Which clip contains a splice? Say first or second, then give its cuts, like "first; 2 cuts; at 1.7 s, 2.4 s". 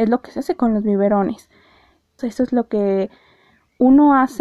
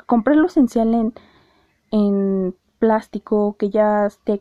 first; 1 cut; at 2.2 s